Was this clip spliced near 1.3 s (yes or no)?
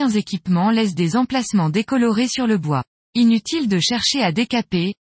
no